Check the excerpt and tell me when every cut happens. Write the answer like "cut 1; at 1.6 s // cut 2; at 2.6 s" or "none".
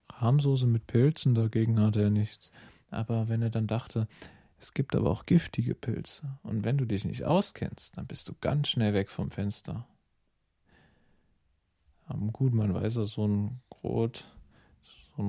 none

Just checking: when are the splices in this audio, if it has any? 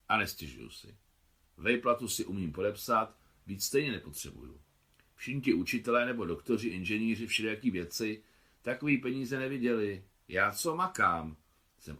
none

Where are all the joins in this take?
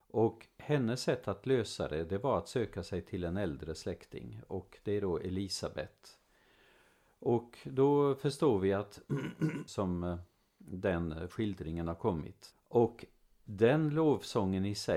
cut 1; at 9.7 s // cut 2; at 12.5 s

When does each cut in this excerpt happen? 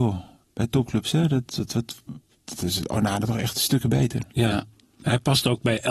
cut 1; at 1.5 s

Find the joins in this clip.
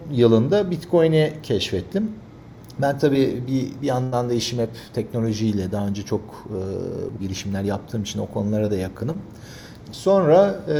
cut 1; at 7.2 s // cut 2; at 9.8 s

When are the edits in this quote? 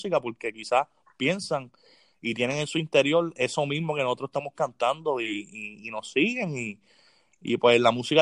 none

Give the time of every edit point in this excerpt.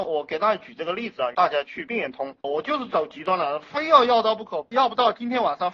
cut 1; at 2.4 s

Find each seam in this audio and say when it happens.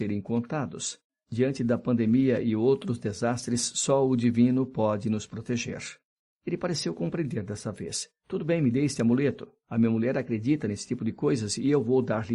none

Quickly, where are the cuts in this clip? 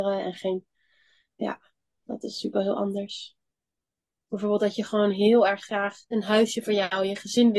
cut 1; at 4.3 s // cut 2; at 6.0 s

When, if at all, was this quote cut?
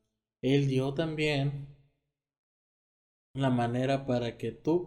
none

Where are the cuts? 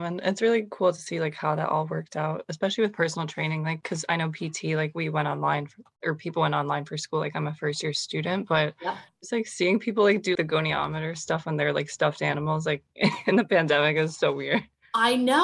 cut 1; at 10.4 s

